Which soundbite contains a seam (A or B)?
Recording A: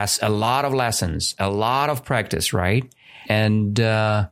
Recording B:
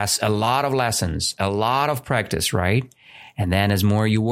A